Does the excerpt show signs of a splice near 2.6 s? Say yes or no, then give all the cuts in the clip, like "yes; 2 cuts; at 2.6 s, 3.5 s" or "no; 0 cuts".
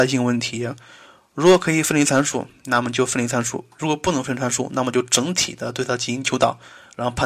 no; 0 cuts